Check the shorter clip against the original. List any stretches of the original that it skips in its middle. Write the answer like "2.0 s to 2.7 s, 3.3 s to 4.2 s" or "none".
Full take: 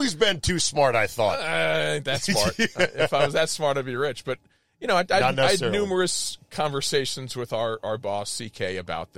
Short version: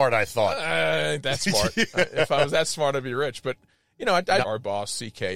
5.2 s to 7.8 s